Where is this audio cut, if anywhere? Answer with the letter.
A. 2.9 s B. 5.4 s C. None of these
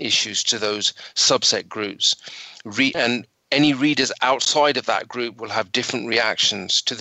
A